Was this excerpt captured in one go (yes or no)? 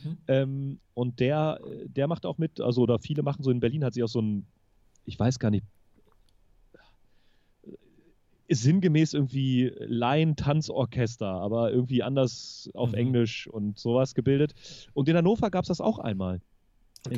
yes